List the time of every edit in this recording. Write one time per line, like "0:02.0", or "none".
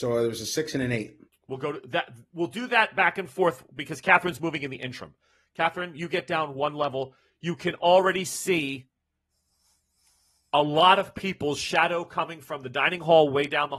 0:01.3

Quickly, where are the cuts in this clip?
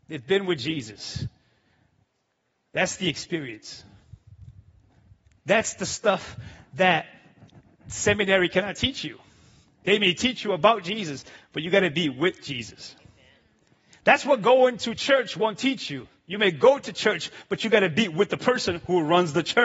none

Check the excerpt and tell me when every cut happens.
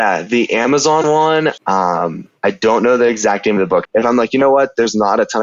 0:01.6
0:03.9

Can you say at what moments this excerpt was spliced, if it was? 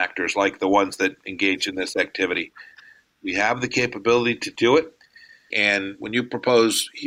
0:05.5

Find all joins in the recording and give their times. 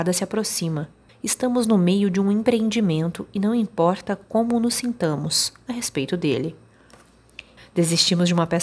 0:01.1
0:07.6

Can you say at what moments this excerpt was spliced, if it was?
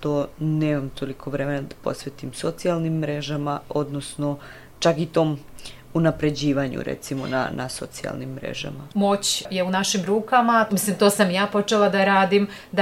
0:08.9
0:10.7

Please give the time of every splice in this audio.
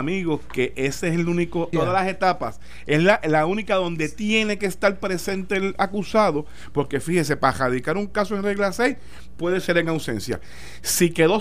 0:01.7

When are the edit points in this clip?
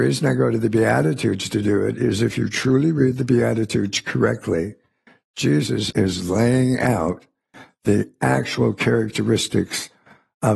0:05.9

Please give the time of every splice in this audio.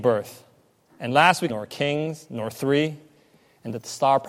0:01.5

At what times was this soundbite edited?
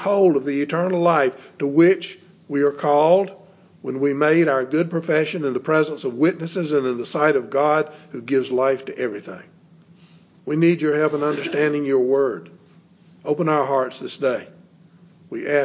0:10.4

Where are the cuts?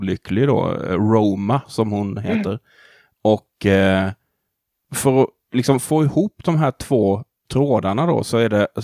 none

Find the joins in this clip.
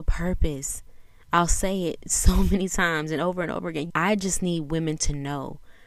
0:03.9

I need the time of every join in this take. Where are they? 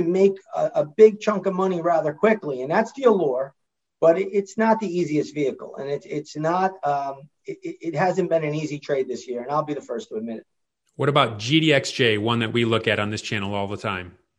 none

